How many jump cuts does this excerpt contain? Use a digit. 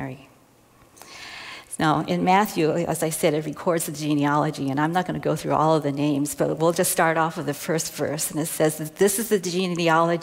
0